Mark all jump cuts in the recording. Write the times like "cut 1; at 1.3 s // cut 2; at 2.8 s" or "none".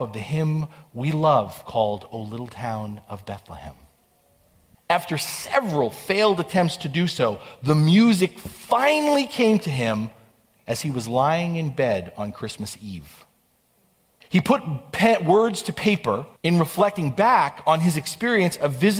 cut 1; at 4.7 s // cut 2; at 14.2 s // cut 3; at 16.4 s